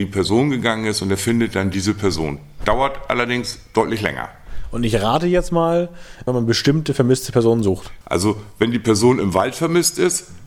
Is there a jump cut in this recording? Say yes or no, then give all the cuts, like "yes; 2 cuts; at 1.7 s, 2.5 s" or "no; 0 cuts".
yes; 2 cuts; at 6.3 s, 8.0 s